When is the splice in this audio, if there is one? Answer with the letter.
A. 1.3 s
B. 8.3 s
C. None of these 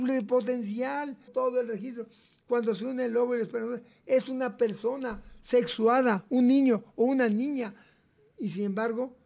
A